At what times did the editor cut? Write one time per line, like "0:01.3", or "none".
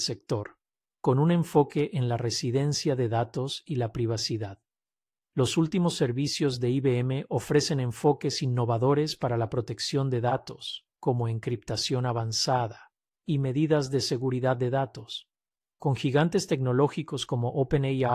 0:10.9
0:13.1
0:15.6